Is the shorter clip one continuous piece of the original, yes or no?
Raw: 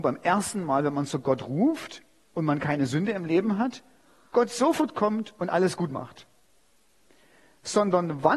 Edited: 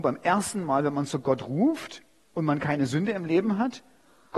yes